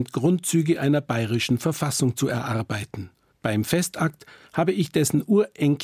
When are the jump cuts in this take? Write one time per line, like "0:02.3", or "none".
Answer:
0:03.3